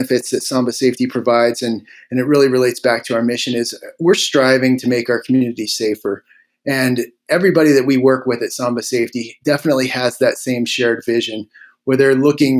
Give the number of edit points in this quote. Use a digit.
0